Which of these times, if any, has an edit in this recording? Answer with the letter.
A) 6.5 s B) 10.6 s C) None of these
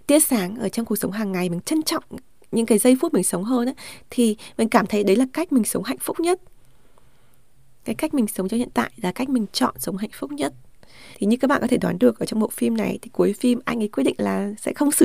C